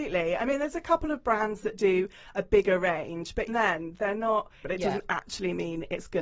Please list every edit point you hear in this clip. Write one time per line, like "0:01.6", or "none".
0:03.5
0:04.6

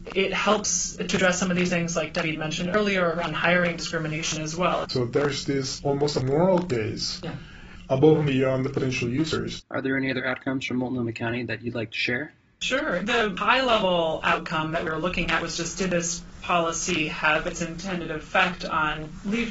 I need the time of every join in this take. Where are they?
0:04.8
0:09.6

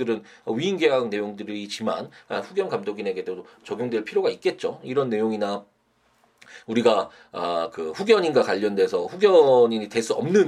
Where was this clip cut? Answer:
none

